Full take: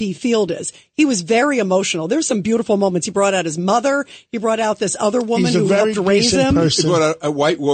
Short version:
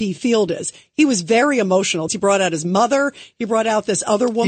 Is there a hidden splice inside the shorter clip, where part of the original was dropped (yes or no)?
yes